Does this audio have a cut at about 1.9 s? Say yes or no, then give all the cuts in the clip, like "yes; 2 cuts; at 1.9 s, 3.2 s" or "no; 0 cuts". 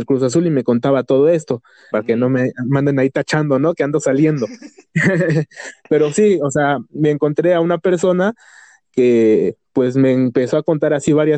yes; 1 cut; at 1.9 s